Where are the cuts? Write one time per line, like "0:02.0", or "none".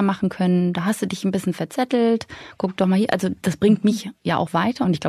none